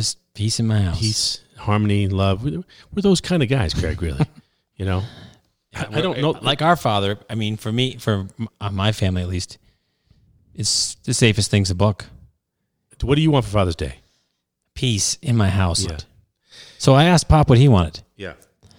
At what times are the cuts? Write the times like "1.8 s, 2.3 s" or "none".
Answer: 12.9 s, 15.8 s